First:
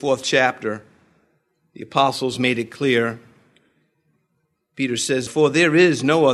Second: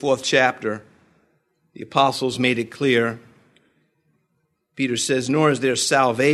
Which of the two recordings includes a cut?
first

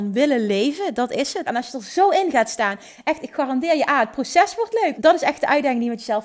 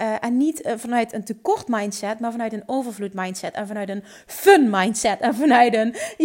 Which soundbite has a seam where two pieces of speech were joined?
first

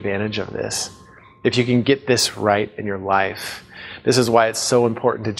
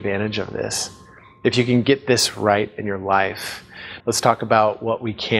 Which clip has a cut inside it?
second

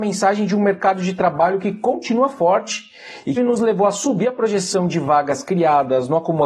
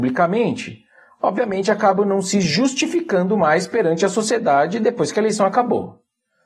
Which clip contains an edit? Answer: first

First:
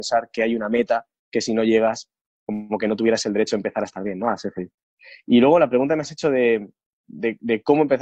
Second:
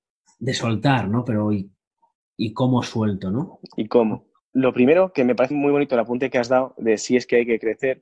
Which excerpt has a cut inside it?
second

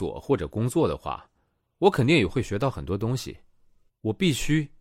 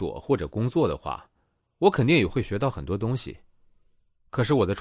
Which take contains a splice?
first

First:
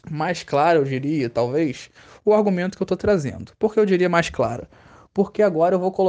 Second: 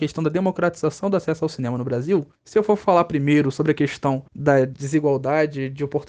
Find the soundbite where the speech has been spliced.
second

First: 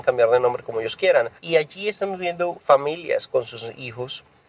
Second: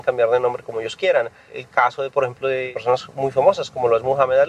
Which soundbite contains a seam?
first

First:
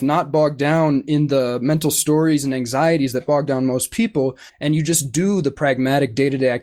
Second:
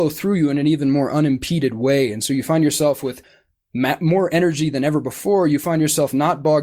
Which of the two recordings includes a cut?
first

